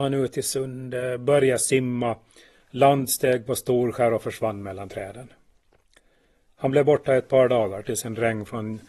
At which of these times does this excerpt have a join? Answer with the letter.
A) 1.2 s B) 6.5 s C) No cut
C